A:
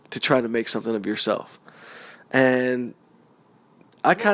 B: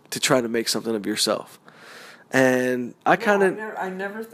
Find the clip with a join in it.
B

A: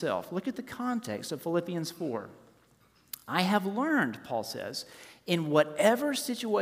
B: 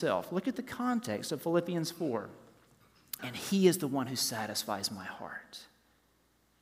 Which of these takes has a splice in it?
B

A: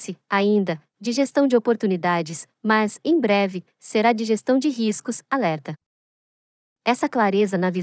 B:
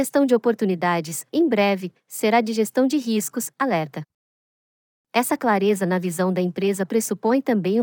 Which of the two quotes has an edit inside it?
B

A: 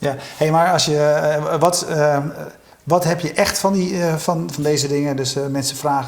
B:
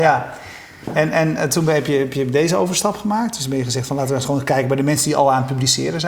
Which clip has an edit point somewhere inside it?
A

